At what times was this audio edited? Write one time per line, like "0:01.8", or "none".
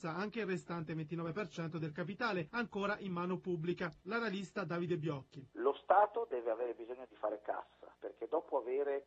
none

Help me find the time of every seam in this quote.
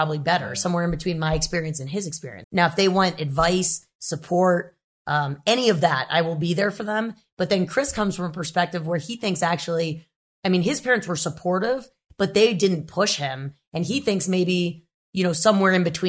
0:02.4

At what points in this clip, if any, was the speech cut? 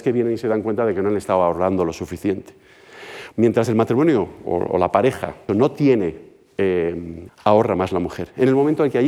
0:03.3
0:05.5
0:07.3

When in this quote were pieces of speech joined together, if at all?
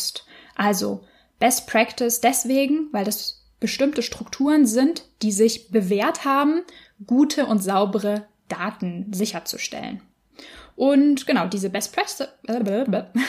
none

